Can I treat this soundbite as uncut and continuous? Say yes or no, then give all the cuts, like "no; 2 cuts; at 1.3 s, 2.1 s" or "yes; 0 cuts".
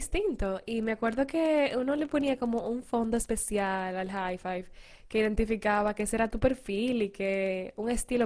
yes; 0 cuts